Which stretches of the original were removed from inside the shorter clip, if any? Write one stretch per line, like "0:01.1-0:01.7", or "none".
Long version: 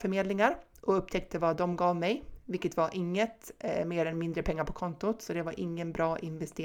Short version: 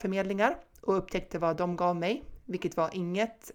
none